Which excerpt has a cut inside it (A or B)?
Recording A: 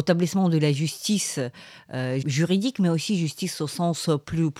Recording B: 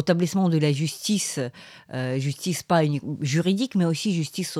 A